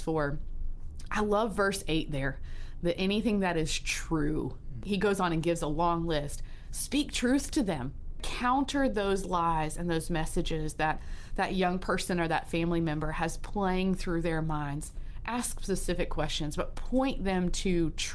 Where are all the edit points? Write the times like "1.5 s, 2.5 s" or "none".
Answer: none